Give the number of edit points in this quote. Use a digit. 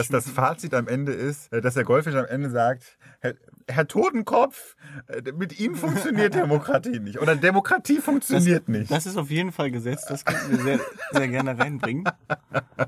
1